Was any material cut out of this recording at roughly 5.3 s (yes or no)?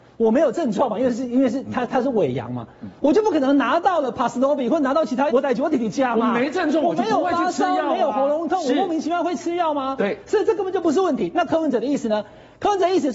yes